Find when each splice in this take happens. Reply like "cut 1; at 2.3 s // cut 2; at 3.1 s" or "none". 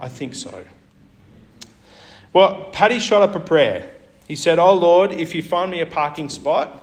none